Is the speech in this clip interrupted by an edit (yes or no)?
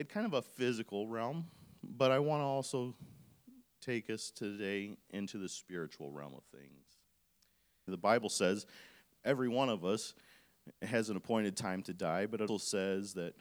yes